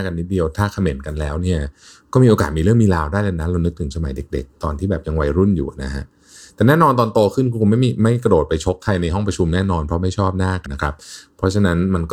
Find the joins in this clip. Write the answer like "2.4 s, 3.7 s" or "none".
10.7 s